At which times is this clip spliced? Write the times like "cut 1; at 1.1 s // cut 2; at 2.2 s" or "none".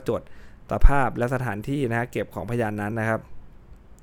cut 1; at 2.9 s